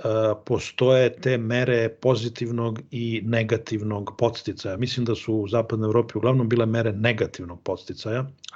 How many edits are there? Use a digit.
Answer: 0